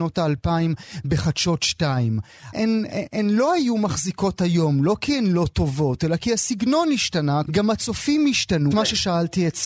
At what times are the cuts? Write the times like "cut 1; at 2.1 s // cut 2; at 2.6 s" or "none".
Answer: cut 1; at 2.5 s // cut 2; at 7.5 s // cut 3; at 8.7 s

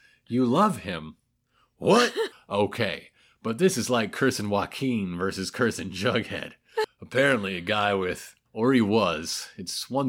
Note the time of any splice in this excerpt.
cut 1; at 2.3 s // cut 2; at 6.8 s // cut 3; at 8.5 s

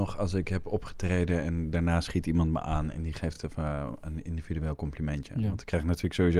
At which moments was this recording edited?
none

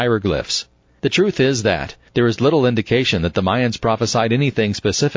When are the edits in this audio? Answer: cut 1; at 2.1 s

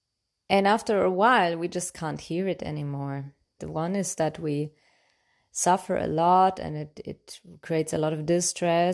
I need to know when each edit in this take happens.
cut 1; at 3.6 s

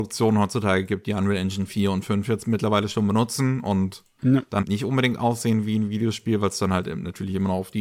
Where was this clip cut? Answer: cut 1; at 4.6 s

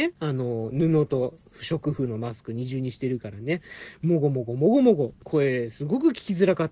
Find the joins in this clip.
cut 1; at 5.2 s

